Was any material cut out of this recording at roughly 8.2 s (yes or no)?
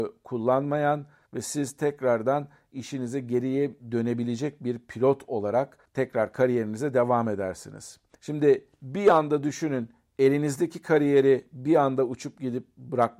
no